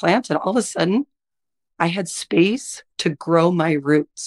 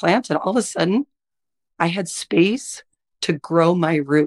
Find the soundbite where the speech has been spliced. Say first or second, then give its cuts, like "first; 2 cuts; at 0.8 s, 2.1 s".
first; 1 cut; at 2.9 s